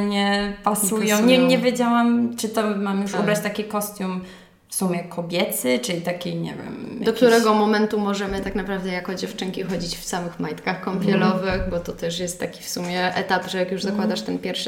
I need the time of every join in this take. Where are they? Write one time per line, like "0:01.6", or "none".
none